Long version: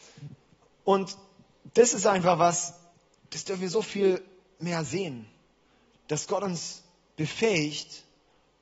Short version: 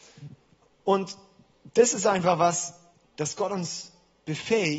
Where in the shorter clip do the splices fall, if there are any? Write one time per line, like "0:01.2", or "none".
0:03.0